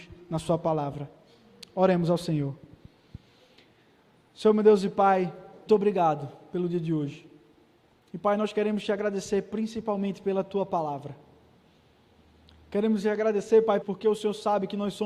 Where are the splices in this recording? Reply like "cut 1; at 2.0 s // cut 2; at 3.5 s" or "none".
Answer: cut 1; at 5.7 s // cut 2; at 13.8 s